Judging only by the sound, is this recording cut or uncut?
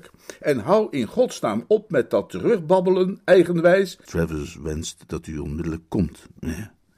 cut